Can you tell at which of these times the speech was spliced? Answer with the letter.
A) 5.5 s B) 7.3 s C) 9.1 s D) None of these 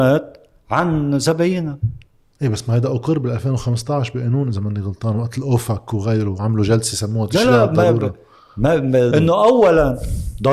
C